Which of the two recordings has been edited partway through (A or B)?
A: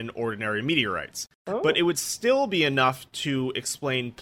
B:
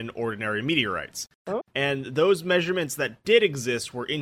B